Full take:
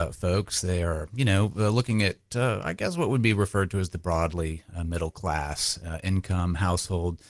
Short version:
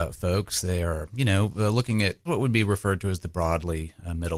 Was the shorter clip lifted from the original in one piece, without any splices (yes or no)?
no